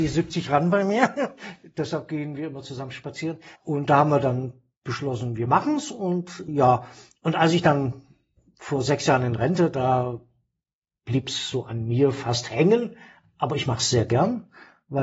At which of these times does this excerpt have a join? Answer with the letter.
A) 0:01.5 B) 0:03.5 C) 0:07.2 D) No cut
B